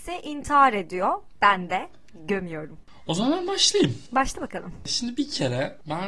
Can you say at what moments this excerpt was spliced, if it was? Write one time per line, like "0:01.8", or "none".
0:01.3
0:02.8